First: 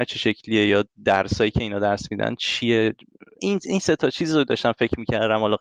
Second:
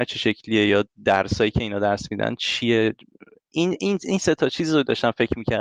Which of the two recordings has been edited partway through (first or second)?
first